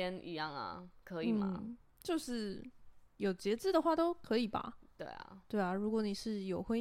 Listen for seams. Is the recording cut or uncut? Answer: uncut